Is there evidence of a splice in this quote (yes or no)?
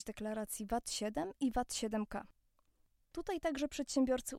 yes